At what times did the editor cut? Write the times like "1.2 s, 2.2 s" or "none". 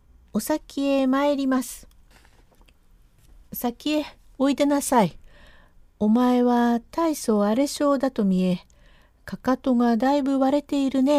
none